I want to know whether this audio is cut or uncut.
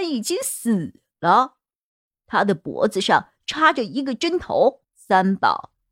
cut